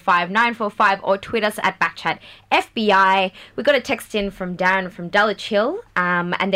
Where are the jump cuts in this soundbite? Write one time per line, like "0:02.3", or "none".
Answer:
none